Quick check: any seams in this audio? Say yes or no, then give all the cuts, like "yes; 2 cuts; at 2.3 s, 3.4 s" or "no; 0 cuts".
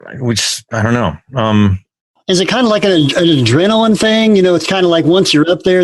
no; 0 cuts